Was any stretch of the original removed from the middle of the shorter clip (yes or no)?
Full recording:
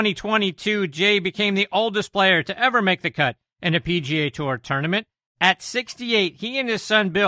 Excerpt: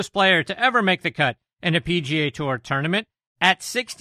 no